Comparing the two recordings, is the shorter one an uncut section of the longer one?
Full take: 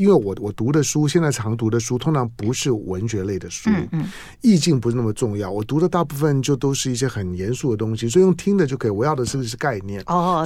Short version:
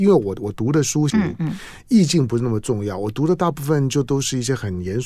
no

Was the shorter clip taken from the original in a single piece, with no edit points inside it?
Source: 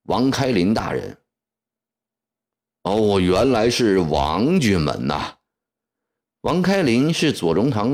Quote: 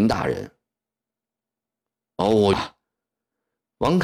no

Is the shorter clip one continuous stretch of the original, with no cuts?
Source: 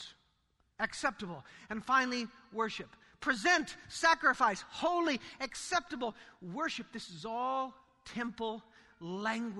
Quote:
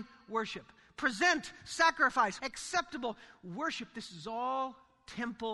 no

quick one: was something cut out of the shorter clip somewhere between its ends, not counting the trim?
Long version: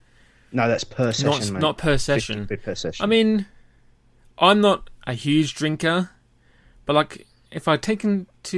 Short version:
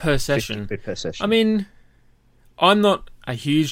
no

